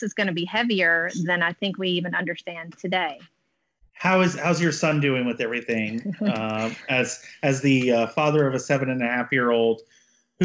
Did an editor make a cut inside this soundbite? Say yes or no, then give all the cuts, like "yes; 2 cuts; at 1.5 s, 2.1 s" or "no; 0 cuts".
no; 0 cuts